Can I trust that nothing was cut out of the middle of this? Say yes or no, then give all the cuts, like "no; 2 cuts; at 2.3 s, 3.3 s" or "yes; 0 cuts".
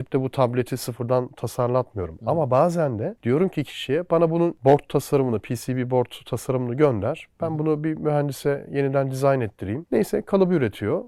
no; 1 cut; at 9.8 s